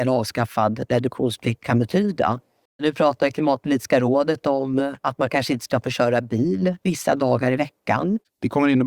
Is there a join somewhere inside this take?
no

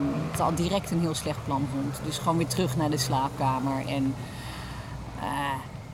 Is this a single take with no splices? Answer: yes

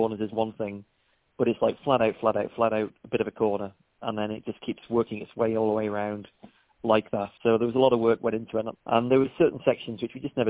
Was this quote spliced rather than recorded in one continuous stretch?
yes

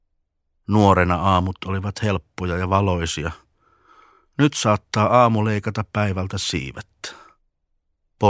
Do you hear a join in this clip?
no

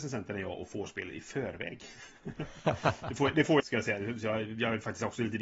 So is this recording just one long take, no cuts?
no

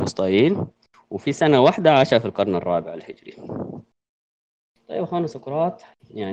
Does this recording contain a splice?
no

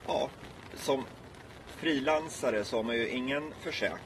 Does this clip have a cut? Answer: no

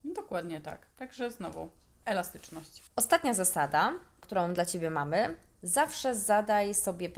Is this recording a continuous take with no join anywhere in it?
yes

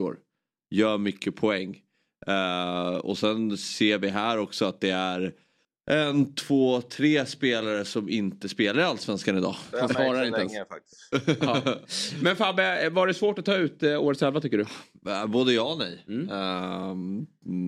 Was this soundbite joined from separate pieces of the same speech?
yes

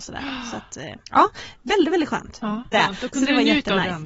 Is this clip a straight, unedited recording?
no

